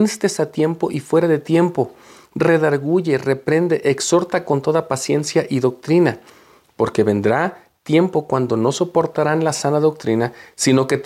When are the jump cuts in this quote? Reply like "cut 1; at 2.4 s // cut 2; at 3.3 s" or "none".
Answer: none